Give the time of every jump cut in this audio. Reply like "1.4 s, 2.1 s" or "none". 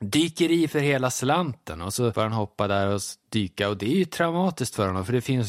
none